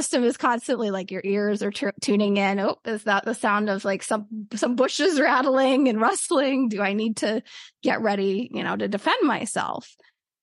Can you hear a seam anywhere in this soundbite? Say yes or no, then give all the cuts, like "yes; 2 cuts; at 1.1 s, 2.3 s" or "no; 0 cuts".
no; 0 cuts